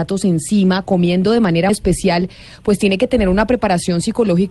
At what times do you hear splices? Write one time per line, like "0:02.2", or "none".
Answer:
0:01.7